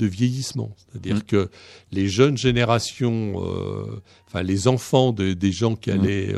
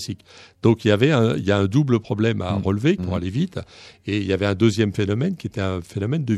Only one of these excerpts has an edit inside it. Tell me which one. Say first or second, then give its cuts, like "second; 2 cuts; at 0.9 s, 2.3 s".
second; 1 cut; at 3.0 s